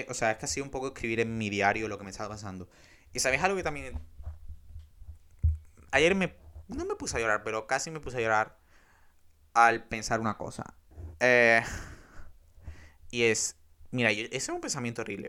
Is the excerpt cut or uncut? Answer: uncut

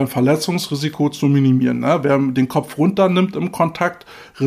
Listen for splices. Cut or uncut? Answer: uncut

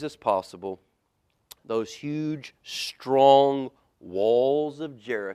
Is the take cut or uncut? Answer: uncut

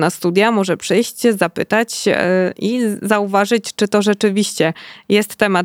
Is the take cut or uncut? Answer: uncut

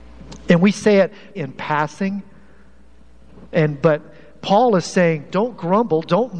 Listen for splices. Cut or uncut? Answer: cut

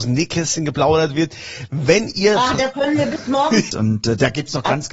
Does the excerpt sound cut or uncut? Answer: cut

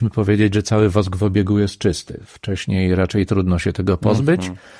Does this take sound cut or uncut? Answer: uncut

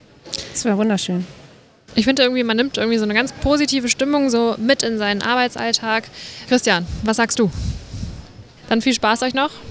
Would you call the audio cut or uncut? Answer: cut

